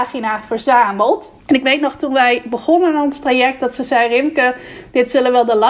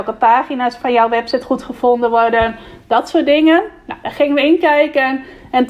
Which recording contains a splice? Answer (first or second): first